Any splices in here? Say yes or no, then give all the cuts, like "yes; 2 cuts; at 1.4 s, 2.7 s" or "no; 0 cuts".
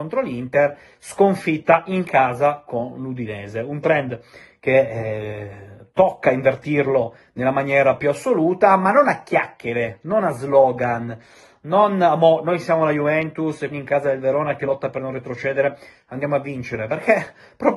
yes; 1 cut; at 13.7 s